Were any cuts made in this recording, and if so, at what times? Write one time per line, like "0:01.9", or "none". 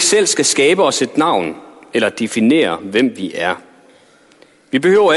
none